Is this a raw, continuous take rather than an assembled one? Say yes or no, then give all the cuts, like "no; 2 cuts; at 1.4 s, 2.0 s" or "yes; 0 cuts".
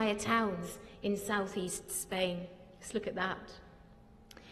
yes; 0 cuts